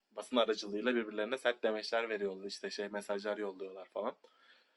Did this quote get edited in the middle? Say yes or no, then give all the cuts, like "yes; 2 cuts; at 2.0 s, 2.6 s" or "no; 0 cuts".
no; 0 cuts